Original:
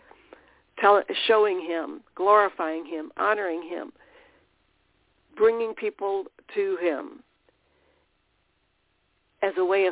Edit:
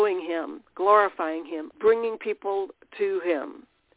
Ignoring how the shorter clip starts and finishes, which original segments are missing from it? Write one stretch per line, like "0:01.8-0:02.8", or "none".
0:03.1-0:05.3